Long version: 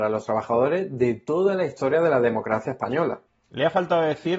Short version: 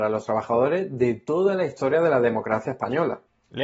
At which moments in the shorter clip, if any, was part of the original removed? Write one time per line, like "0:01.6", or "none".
none